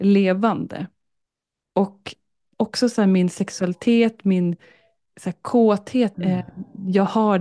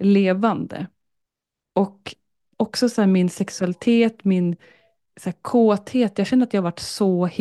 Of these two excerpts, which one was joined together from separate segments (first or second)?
first